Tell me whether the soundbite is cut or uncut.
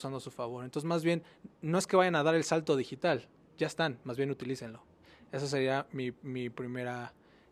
uncut